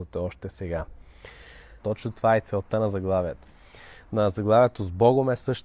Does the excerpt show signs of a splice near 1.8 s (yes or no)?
yes